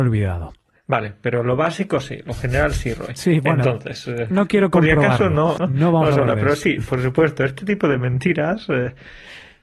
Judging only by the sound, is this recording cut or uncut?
cut